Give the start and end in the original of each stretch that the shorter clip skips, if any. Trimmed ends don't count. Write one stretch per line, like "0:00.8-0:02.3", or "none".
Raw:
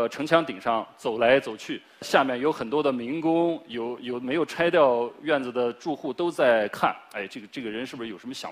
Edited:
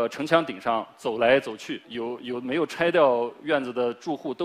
0:01.8-0:03.6